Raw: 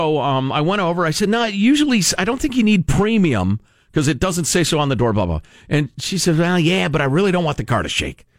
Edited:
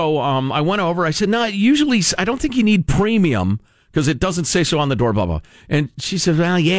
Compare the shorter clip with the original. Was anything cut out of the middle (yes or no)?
no